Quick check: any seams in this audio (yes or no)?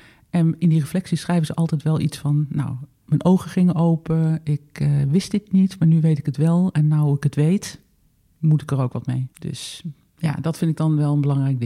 no